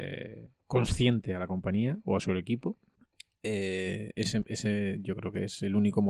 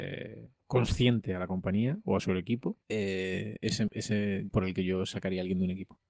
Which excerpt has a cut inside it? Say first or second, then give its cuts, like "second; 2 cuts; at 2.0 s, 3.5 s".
second; 2 cuts; at 2.8 s, 4.5 s